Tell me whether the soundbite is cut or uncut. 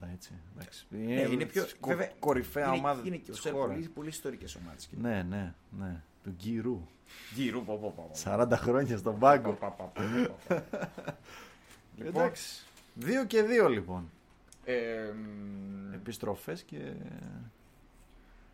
uncut